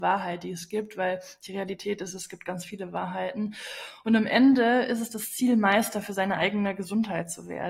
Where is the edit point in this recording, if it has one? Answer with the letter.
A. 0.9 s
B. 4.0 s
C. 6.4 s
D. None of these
D